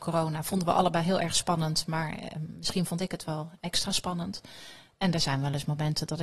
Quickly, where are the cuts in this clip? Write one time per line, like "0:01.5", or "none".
none